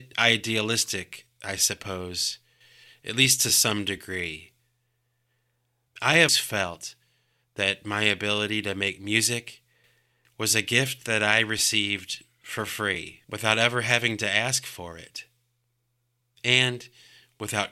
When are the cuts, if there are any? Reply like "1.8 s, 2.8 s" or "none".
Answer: 6.3 s, 13.2 s